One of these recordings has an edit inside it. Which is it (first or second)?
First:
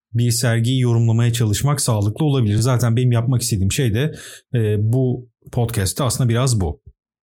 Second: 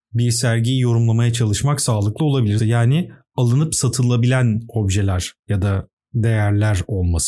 second